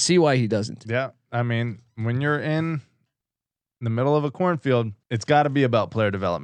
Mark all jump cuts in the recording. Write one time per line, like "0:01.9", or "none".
0:05.0